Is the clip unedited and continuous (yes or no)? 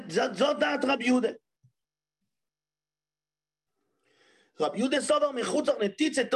yes